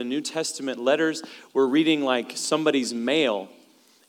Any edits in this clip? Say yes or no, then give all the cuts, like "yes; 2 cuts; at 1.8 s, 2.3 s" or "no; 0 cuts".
no; 0 cuts